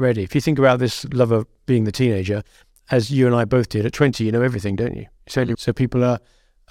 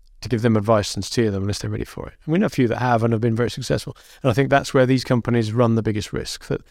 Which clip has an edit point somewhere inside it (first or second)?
first